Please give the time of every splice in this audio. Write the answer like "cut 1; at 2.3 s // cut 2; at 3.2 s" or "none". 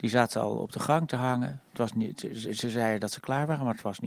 none